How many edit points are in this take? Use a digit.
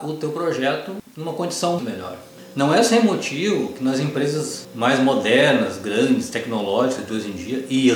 1